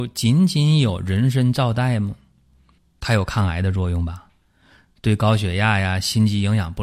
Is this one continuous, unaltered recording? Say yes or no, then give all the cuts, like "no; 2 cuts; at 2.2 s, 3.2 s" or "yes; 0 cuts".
no; 1 cut; at 2.8 s